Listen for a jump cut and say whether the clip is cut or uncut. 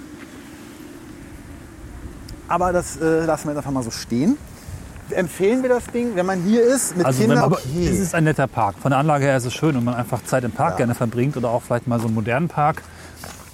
cut